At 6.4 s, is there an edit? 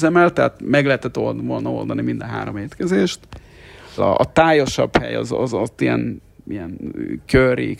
yes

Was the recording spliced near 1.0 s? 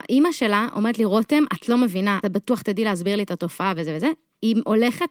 no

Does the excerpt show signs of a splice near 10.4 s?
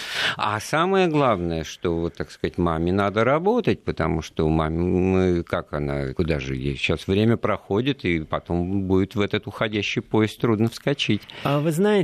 yes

